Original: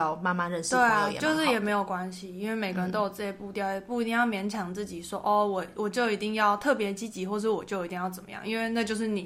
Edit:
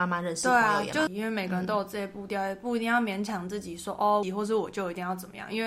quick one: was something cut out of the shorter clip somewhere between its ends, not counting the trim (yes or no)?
yes